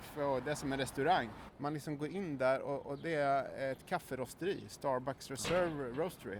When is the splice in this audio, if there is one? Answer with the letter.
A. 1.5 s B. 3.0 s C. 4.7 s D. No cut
A